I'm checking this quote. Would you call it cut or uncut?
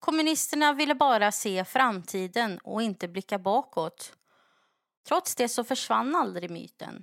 cut